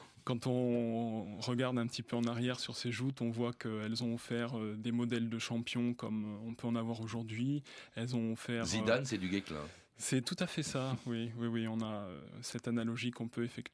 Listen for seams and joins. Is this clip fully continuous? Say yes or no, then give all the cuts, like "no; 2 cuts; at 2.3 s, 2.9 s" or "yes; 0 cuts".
yes; 0 cuts